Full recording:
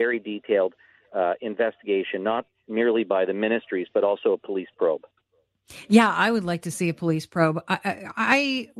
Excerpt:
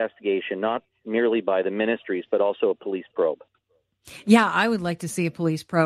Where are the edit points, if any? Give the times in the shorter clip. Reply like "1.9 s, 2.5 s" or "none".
none

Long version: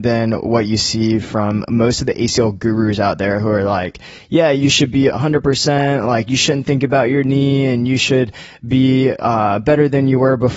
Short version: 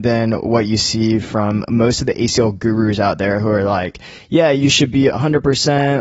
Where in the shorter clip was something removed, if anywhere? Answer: none

